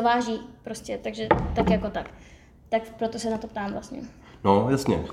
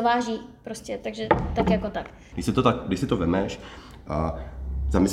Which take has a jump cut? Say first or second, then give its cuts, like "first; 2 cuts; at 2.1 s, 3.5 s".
second; 1 cut; at 2.3 s